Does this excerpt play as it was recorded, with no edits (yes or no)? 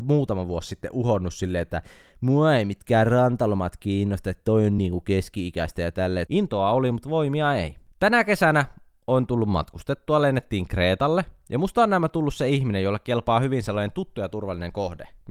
no